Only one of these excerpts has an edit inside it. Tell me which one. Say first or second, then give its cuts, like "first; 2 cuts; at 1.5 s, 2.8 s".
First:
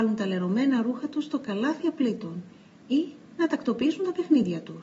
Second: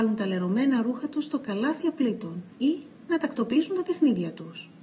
second; 1 cut; at 2.5 s